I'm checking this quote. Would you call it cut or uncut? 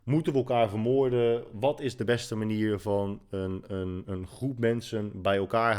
cut